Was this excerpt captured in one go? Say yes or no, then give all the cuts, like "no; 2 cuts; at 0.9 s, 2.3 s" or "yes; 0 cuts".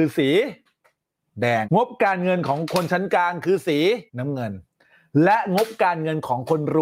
no; 2 cuts; at 1.6 s, 4.1 s